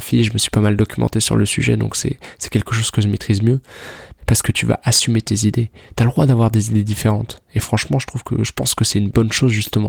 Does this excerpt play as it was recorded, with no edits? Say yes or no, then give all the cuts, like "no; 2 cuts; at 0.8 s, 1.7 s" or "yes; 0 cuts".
no; 1 cut; at 4.2 s